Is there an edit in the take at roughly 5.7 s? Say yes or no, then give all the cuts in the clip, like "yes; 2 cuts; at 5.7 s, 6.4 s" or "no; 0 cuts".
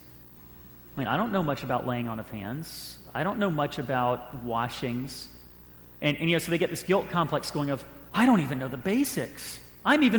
no; 0 cuts